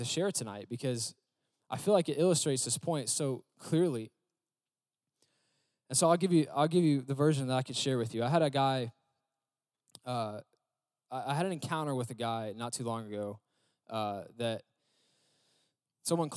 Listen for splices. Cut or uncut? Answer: uncut